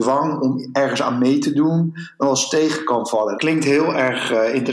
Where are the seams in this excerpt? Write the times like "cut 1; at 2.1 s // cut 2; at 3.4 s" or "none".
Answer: cut 1; at 3.4 s